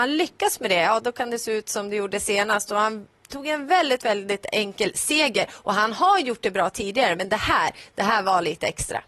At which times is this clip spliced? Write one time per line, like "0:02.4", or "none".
none